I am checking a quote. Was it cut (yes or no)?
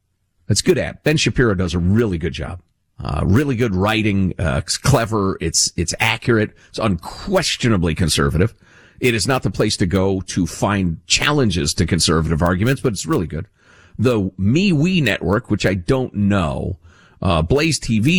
no